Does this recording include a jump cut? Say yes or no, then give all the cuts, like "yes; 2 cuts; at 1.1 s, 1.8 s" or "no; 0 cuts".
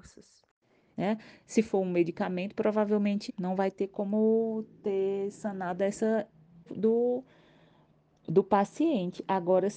yes; 3 cuts; at 0.9 s, 3.3 s, 6.7 s